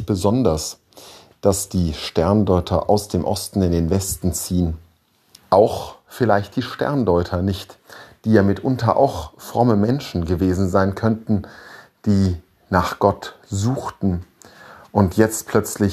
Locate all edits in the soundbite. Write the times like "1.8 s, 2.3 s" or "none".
5.4 s